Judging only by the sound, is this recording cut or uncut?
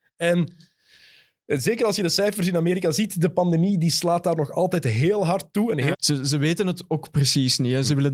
cut